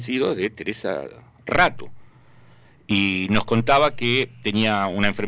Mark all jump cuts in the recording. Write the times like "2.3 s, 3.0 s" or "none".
none